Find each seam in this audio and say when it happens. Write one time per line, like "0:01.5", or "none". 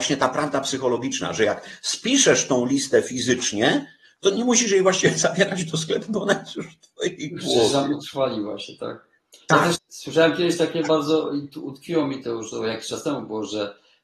0:09.7